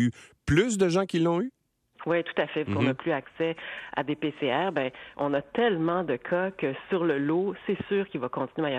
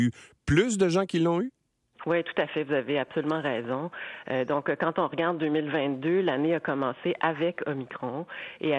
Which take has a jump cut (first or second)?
first